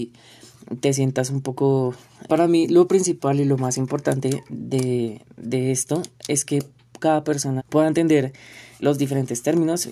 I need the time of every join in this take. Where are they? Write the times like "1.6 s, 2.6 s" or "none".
2.3 s, 7.6 s, 8.8 s